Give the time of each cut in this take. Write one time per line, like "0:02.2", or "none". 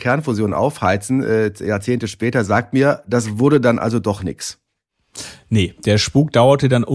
none